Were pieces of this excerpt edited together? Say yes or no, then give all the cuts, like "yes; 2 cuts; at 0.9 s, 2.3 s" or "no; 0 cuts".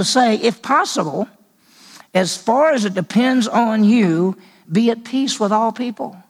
no; 0 cuts